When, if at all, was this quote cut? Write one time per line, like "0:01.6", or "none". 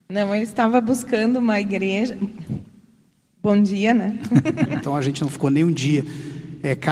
0:04.8